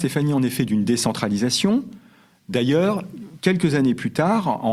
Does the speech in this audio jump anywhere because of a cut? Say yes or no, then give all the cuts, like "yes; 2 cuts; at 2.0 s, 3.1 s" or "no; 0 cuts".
no; 0 cuts